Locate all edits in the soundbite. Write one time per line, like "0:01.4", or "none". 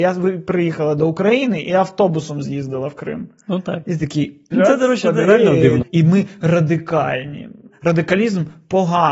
0:04.5
0:05.8